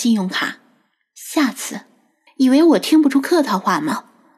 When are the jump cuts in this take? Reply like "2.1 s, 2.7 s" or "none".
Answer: 2.3 s